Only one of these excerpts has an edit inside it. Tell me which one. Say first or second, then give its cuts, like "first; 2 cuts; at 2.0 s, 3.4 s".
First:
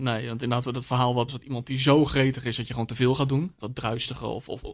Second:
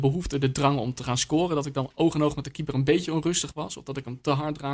first; 2 cuts; at 1.3 s, 3.6 s